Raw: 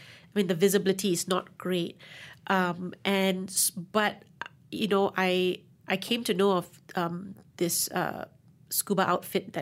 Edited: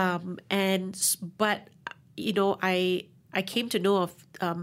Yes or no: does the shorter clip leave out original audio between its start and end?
no